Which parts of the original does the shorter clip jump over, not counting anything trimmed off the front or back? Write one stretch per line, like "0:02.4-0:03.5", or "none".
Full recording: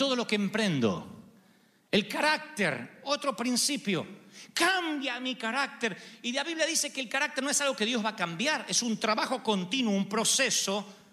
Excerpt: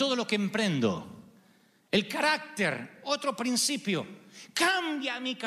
none